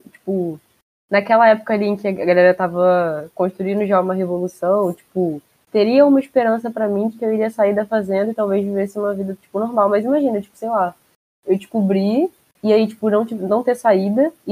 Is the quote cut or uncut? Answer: uncut